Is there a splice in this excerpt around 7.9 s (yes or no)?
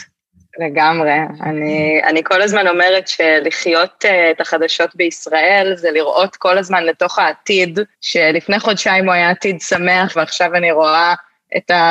yes